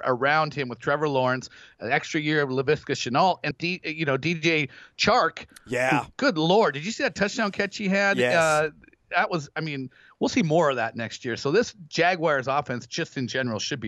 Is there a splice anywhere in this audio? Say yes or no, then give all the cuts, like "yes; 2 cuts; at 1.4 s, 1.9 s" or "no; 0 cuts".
yes; 1 cut; at 3.5 s